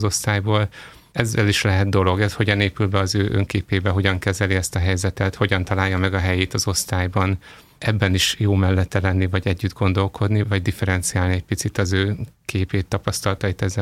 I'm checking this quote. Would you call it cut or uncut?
cut